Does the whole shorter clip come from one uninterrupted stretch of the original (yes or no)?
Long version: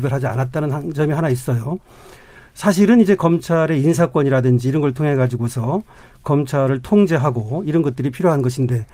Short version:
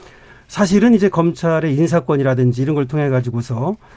yes